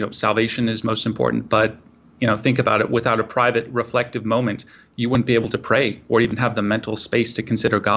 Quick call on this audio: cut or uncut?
uncut